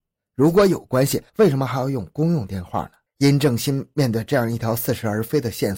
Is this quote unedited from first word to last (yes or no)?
no